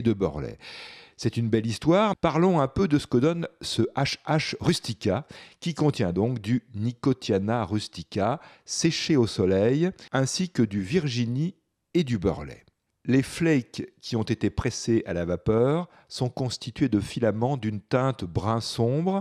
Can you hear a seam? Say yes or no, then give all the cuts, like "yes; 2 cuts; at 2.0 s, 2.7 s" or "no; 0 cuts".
yes; 2 cuts; at 2.1 s, 10.1 s